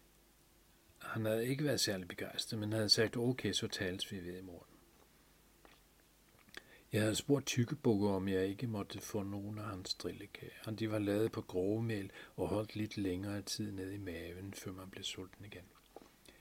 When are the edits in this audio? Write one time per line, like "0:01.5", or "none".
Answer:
none